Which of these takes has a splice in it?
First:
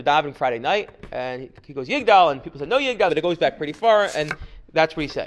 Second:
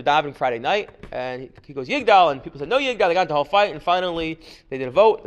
first; 1 cut; at 3.1 s

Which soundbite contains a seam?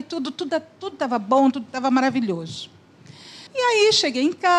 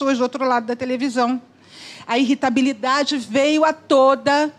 first; 1 cut; at 3.5 s

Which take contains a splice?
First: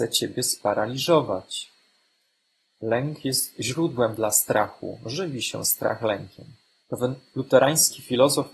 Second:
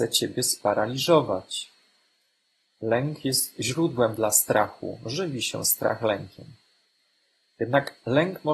first; 1 cut; at 6.8 s

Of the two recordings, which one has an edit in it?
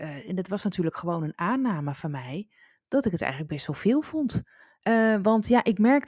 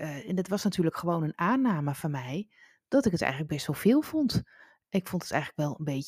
first; 1 cut; at 4.8 s

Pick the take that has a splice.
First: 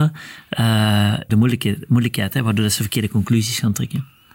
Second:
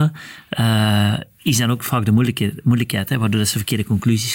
first; 1 cut; at 1.3 s

